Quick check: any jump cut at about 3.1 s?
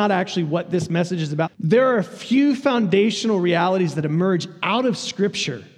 no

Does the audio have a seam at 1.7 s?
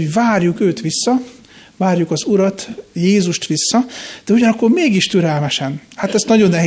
no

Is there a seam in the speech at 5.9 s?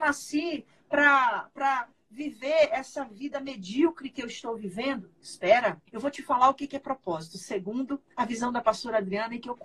yes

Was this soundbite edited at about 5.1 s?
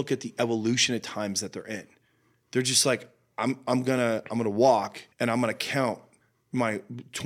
yes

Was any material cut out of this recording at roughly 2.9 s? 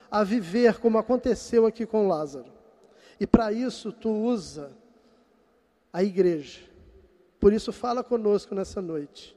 no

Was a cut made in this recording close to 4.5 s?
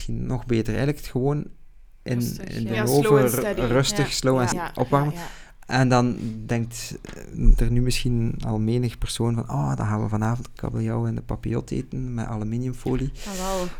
yes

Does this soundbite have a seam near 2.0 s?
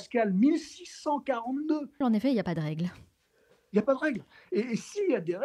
yes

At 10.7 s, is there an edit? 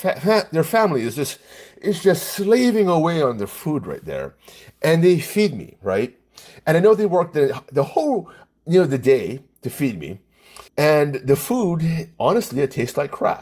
yes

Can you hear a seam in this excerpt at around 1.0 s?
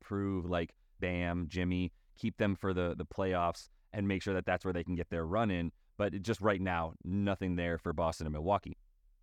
yes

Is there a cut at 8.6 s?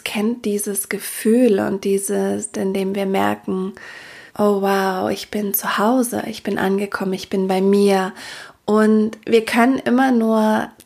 no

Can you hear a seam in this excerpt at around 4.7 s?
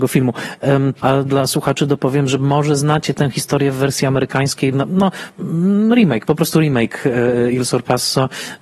yes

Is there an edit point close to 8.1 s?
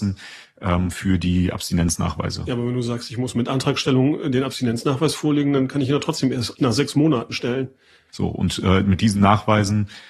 yes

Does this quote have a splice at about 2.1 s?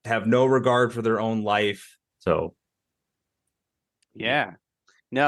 yes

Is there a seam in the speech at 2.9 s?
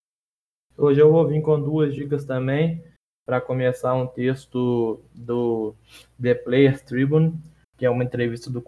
no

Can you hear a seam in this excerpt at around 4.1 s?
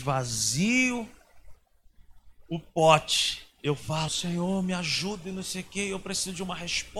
yes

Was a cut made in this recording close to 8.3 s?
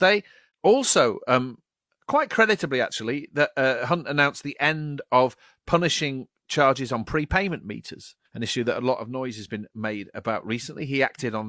yes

